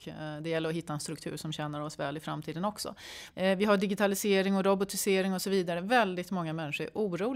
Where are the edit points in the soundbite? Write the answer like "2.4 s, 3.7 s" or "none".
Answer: 3.3 s